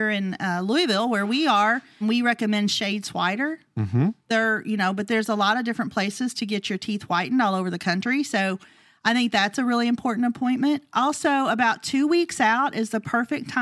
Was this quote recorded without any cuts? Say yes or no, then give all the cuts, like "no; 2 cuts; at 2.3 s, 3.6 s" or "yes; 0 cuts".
no; 1 cut; at 2.0 s